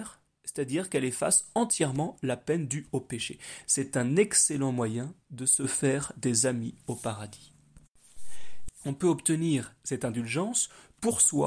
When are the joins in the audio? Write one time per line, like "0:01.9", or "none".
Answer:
0:03.6
0:08.7